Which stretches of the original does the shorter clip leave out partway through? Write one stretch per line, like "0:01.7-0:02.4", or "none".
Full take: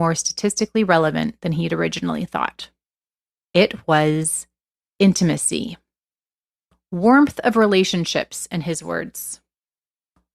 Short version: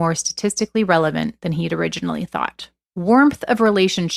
0:02.9-0:06.9